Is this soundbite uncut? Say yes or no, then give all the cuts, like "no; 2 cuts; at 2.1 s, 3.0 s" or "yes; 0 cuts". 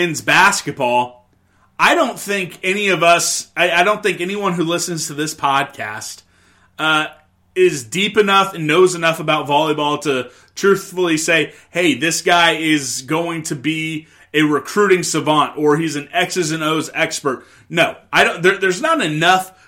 yes; 0 cuts